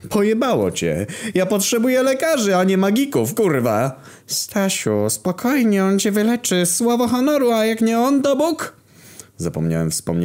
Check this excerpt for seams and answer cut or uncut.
uncut